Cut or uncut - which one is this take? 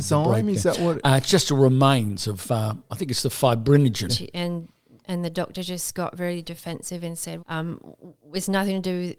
cut